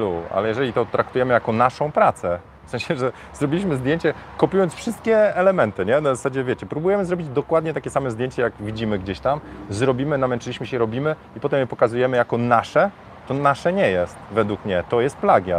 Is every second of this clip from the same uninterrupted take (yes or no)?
yes